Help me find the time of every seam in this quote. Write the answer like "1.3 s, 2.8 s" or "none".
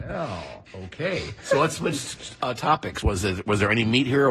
none